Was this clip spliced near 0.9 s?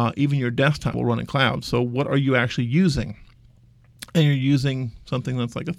yes; 1 cut; at 0.9 s

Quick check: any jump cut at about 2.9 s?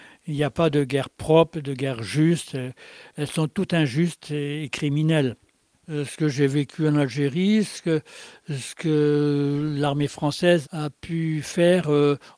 no; 0 cuts

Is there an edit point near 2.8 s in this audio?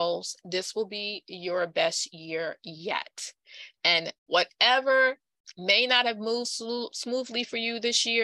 no; 2 cuts; at 4.2 s, 6.4 s

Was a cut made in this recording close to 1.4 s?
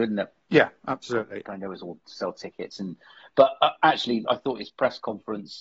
yes; 1 cut; at 1.4 s

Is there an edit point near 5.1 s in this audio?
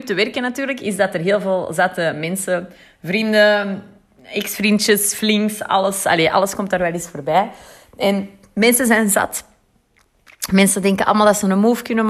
no; 0 cuts

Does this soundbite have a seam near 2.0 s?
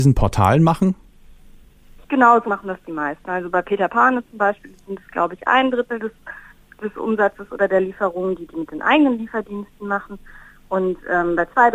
yes; 1 cut; at 2.0 s

